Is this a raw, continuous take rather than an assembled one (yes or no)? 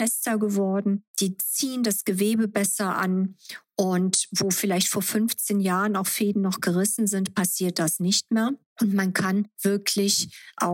yes